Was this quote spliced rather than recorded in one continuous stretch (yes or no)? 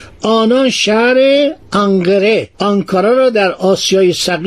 yes